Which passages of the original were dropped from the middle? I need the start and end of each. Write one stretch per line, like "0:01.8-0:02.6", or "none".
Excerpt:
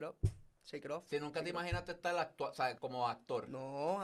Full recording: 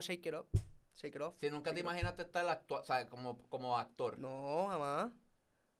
0:03.1-0:03.5

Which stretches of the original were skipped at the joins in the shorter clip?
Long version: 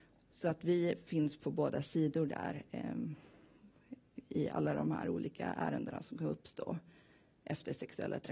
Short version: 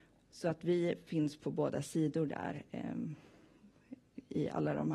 none

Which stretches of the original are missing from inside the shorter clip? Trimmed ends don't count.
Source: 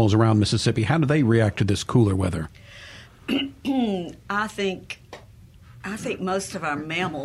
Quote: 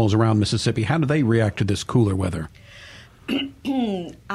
none

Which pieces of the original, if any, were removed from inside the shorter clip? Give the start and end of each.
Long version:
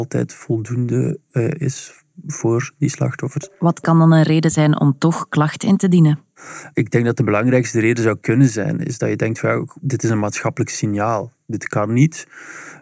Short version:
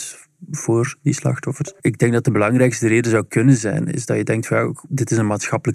0:03.6-0:06.7

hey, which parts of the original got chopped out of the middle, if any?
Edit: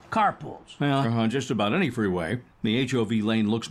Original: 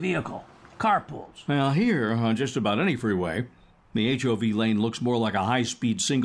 0:01.7-0:02.1
0:03.6-0:03.8

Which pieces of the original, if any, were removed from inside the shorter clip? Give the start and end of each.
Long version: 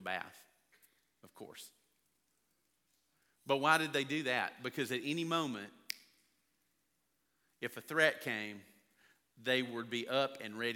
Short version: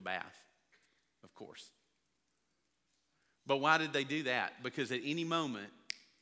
none

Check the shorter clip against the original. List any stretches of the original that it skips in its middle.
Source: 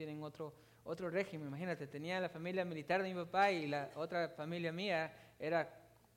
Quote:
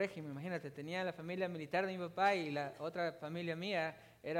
none

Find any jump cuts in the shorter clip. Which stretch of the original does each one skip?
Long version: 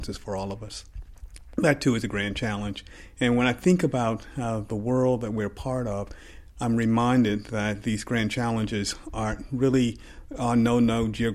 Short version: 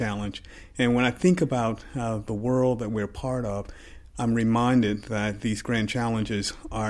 none

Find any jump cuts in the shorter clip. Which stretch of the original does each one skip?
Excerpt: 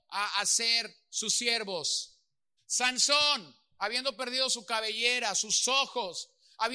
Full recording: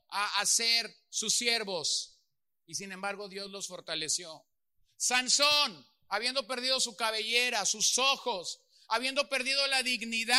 0:02.6-0:04.9

